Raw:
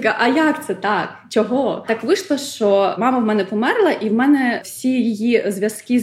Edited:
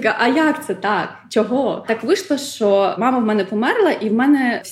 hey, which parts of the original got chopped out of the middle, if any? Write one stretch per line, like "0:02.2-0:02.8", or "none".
none